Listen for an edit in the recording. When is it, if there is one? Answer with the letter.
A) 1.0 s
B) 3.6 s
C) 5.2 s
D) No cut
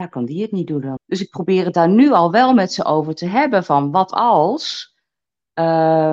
A